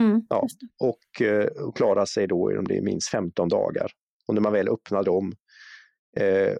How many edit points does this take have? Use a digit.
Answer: 0